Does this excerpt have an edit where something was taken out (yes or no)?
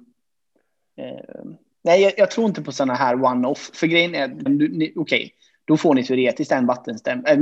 yes